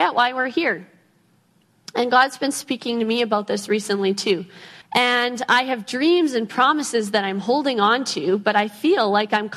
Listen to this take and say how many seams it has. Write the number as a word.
one